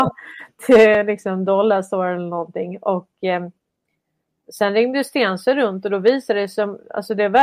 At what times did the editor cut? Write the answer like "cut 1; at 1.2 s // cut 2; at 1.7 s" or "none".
none